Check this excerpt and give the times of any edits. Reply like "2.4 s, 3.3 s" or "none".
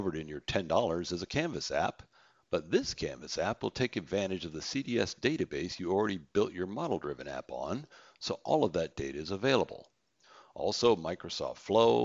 none